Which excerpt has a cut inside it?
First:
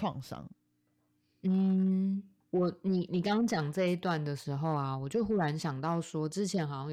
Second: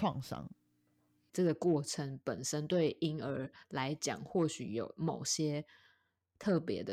second; 1 cut; at 1.3 s

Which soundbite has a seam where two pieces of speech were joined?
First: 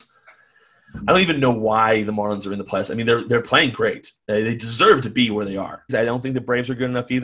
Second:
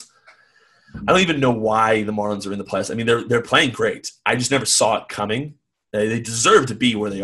first; 2 cuts; at 4.2 s, 5.9 s

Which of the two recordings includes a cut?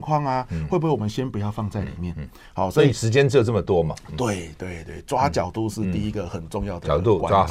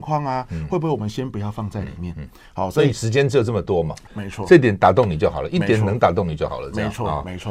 second; 1 cut; at 4.1 s

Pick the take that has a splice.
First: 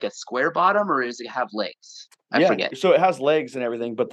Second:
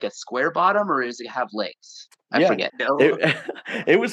second; 1 cut; at 2.7 s

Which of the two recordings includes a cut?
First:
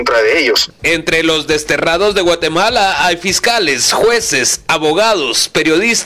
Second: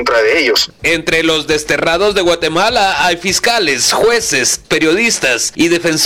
second; 1 cut; at 4.6 s

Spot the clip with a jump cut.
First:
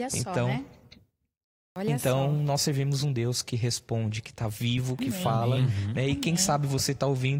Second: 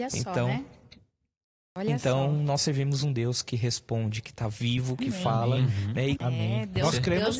second; 1 cut; at 6.2 s

